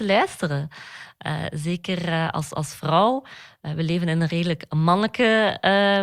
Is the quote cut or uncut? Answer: uncut